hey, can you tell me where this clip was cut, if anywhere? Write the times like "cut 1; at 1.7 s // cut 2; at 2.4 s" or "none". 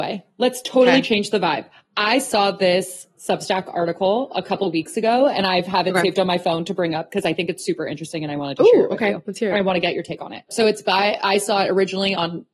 cut 1; at 10.5 s